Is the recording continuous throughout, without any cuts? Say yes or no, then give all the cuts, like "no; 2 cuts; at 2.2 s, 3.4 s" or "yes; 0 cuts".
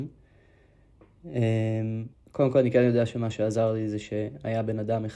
no; 1 cut; at 2.1 s